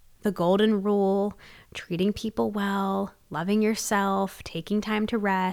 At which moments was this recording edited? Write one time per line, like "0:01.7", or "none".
none